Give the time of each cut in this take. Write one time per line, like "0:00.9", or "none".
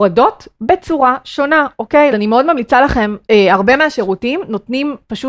0:02.1
0:03.3